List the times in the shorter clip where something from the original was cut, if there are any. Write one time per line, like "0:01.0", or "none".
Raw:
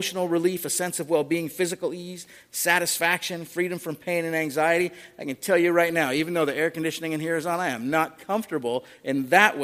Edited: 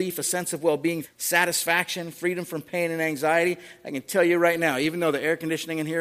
0:01.0